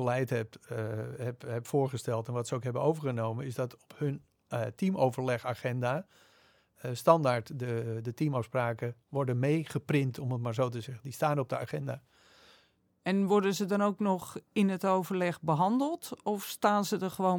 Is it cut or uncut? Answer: uncut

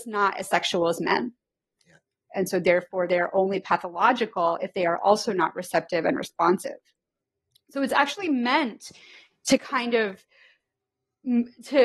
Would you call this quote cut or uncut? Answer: cut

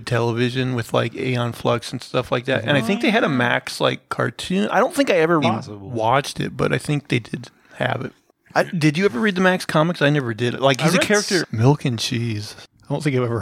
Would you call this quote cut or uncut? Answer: cut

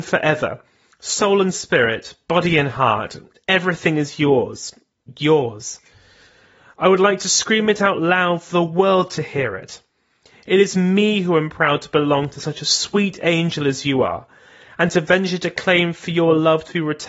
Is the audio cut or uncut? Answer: uncut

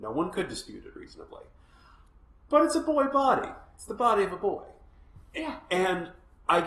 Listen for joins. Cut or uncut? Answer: uncut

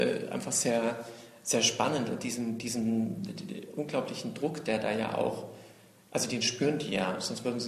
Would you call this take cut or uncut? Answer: uncut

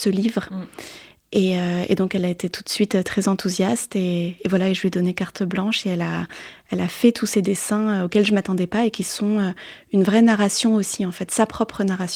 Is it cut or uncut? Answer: uncut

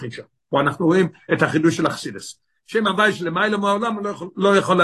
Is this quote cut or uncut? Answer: cut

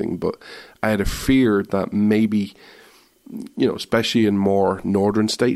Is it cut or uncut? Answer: uncut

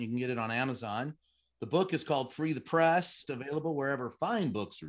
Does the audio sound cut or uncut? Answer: cut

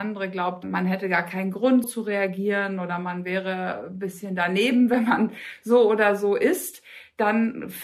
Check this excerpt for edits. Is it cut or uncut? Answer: cut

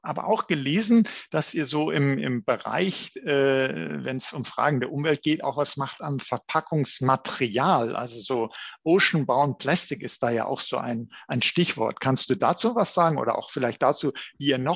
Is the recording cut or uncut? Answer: uncut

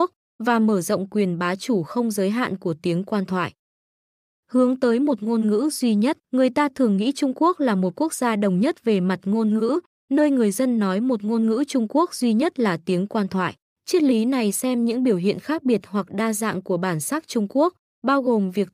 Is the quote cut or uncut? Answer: cut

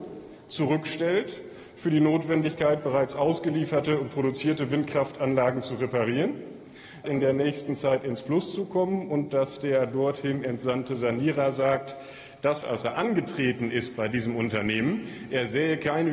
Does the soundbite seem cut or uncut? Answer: cut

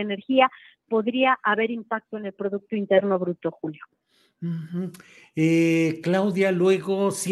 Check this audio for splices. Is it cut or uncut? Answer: uncut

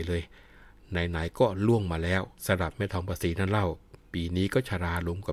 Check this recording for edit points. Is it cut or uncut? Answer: cut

